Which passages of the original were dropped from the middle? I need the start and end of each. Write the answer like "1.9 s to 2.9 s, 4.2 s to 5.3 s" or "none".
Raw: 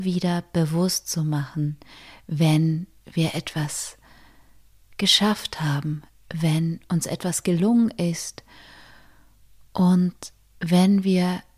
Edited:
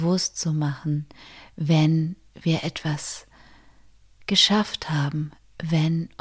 none

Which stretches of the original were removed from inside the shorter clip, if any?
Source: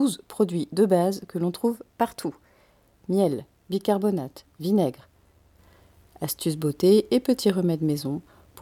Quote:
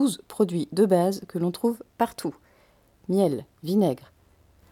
3.6 s to 4.5 s

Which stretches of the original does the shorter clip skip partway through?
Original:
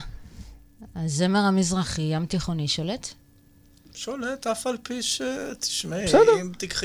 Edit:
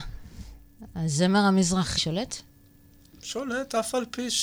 2.0 s to 2.7 s

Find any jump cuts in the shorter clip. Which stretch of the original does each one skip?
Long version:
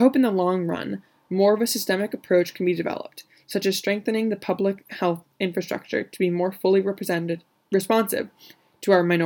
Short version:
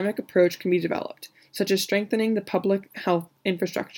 none

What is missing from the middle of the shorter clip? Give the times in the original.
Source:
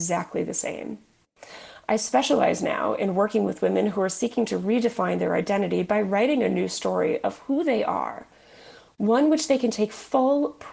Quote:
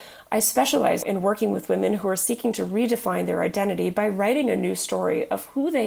2.6 s to 3.0 s

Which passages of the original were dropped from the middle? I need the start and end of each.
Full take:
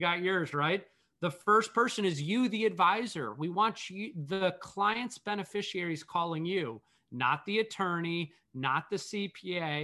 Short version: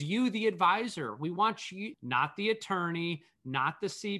4.1 s to 7.0 s

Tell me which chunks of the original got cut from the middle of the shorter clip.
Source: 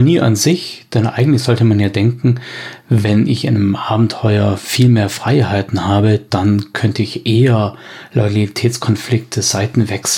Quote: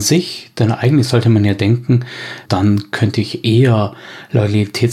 2.8 s to 6.3 s

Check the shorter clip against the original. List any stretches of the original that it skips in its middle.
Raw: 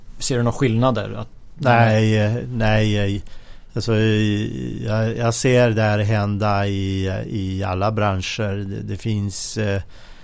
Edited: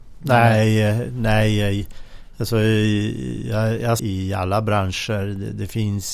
5.4 s to 7.3 s

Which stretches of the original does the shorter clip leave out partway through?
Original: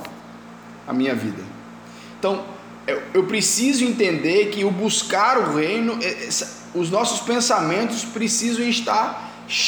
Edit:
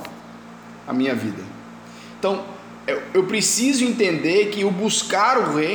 none

